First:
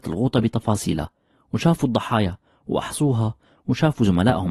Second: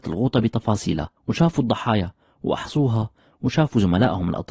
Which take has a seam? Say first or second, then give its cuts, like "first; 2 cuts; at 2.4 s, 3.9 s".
second; 1 cut; at 1.2 s